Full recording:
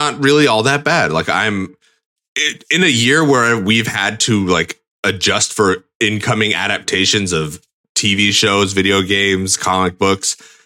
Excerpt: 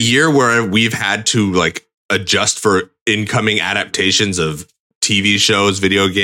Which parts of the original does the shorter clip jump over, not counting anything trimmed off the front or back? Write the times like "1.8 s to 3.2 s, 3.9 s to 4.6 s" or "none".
none